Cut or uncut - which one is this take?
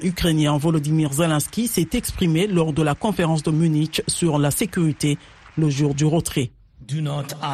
uncut